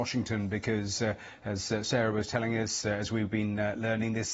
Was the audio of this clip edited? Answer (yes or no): no